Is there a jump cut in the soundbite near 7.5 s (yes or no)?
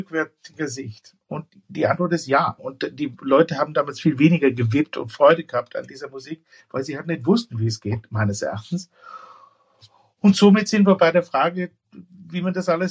no